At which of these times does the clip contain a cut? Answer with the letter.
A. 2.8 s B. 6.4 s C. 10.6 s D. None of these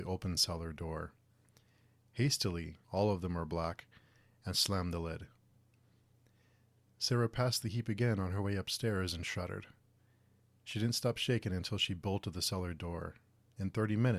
A